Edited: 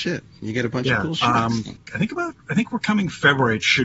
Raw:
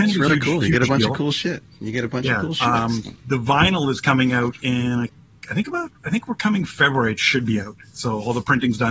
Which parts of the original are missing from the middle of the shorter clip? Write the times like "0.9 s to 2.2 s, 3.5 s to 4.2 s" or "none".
3.2 s to 5.3 s